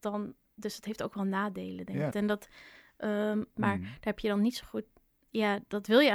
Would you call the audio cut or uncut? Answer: cut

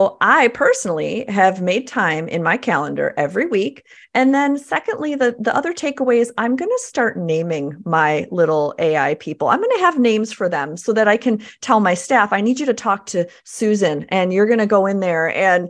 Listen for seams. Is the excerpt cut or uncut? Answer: cut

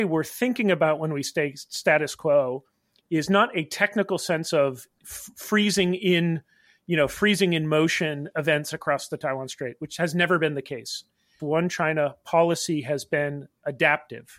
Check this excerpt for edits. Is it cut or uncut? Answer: cut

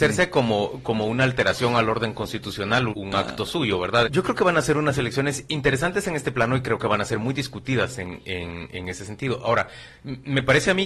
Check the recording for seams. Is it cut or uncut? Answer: cut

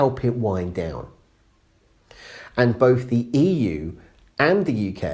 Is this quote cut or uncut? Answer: uncut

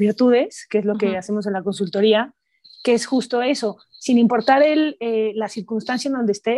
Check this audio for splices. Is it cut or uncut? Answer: uncut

